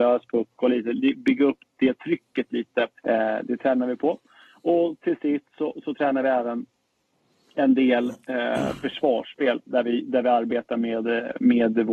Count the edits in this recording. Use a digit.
1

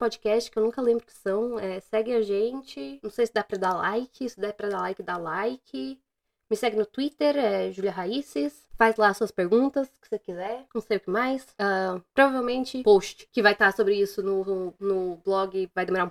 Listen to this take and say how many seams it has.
0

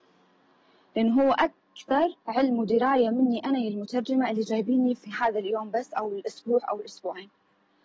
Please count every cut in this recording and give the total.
1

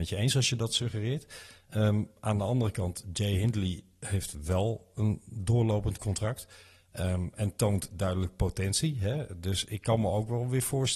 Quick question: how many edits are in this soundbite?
0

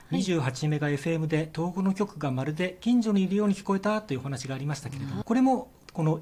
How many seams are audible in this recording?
1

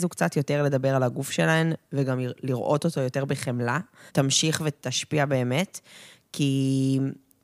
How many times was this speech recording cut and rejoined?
1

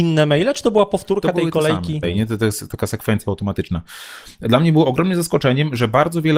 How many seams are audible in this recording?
1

